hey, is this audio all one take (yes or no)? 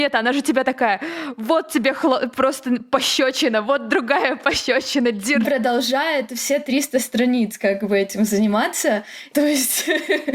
no